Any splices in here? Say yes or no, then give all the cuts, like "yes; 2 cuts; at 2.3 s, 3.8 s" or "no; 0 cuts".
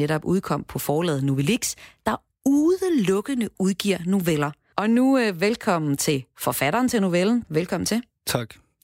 yes; 2 cuts; at 4.7 s, 7.4 s